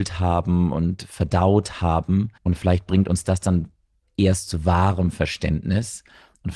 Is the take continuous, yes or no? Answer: no